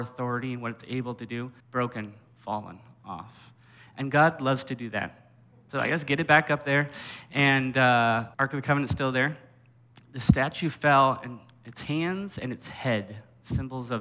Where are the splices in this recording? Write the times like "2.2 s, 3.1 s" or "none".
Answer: 1.6 s, 5.7 s, 8.3 s